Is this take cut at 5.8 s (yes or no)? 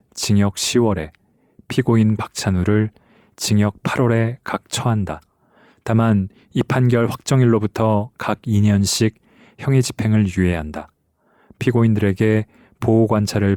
no